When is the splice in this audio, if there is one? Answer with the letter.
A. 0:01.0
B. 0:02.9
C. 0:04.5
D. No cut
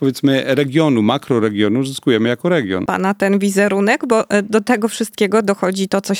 B